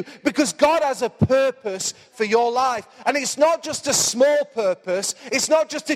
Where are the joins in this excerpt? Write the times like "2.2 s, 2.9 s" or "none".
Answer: none